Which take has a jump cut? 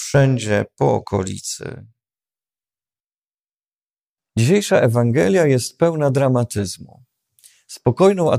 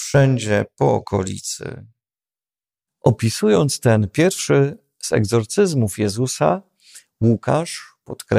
second; 1 cut; at 2.9 s

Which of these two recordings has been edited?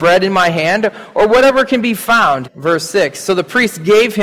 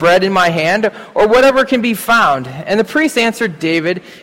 first; 1 cut; at 2.4 s

